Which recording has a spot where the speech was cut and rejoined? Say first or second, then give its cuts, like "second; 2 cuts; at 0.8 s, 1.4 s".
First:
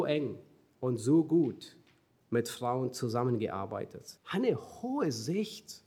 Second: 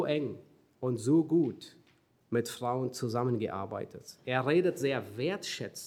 first; 1 cut; at 4.2 s